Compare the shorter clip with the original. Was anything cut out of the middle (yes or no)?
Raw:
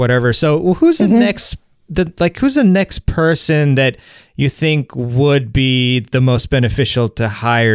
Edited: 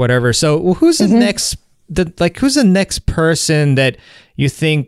no